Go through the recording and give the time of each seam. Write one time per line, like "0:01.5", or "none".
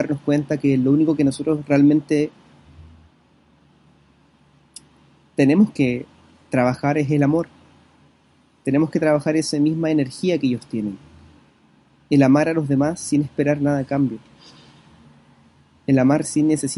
none